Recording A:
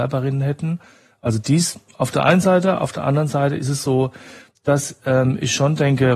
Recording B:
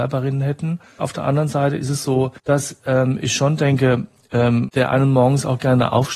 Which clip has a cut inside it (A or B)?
B